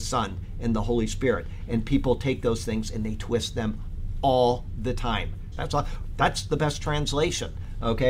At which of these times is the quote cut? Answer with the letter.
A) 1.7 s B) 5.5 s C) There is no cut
B